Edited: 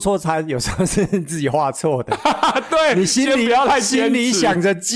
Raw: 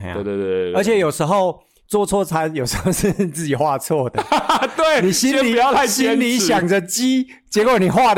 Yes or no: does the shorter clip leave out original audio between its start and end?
no